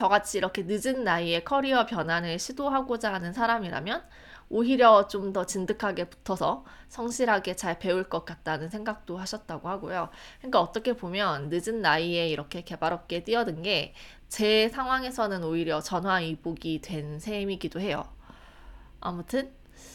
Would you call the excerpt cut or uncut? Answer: uncut